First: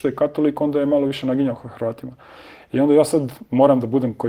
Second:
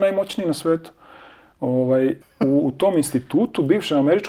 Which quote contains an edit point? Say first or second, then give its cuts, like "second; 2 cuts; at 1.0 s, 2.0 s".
second; 1 cut; at 2.2 s